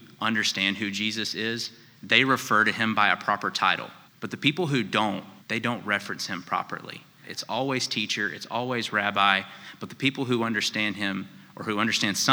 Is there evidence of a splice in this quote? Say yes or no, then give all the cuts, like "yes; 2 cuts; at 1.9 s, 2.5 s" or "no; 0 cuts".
yes; 3 cuts; at 4.1 s, 5.4 s, 7.2 s